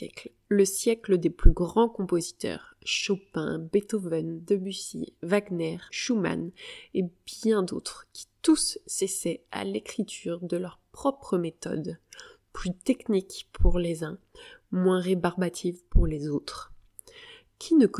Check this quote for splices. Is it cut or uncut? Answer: cut